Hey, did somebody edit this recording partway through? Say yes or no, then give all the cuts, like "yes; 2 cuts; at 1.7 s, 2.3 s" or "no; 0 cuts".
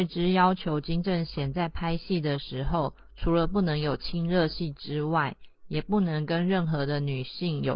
no; 0 cuts